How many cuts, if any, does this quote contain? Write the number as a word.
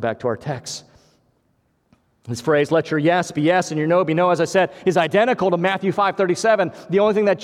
zero